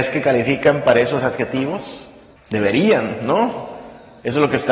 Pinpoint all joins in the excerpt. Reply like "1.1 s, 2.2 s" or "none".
2.4 s